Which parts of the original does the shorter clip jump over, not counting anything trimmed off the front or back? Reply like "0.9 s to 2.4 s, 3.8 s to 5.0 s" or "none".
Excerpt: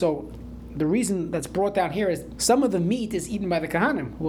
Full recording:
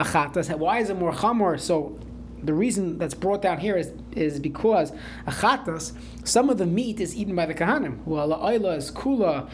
4.0 s to 6.2 s